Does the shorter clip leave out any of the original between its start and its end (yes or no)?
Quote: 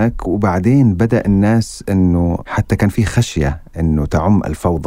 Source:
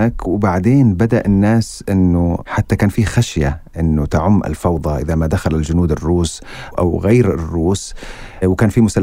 no